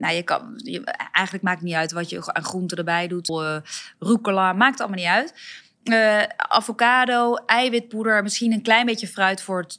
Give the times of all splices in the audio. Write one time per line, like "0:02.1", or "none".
0:03.3